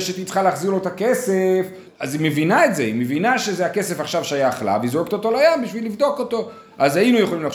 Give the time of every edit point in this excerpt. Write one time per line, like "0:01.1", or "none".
0:01.9